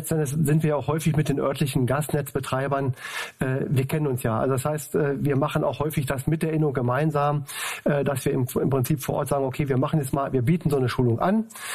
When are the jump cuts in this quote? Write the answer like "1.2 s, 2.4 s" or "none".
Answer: none